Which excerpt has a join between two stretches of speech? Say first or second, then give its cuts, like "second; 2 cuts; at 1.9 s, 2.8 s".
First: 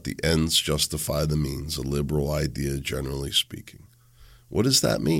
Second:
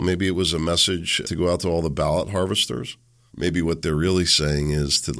second; 2 cuts; at 1.2 s, 3.3 s